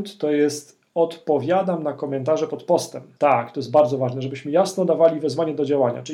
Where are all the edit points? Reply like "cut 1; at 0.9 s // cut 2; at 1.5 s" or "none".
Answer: cut 1; at 3.2 s